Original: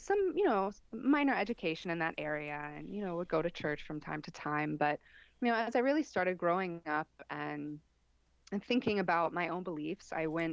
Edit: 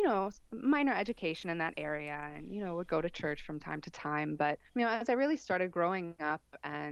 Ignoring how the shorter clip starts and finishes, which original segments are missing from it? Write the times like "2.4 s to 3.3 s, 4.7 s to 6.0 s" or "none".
5.1 s to 5.3 s